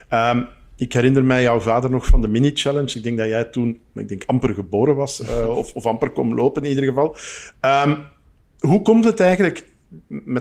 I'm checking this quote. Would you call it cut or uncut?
uncut